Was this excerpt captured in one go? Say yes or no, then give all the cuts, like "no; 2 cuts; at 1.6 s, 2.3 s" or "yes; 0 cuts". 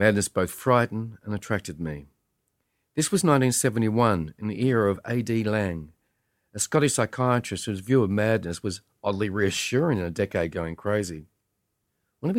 yes; 0 cuts